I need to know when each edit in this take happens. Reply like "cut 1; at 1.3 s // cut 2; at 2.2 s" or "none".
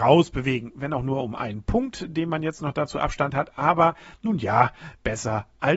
none